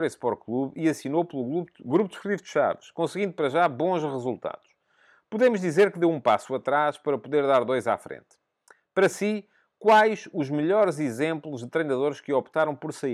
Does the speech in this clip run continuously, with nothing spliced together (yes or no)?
yes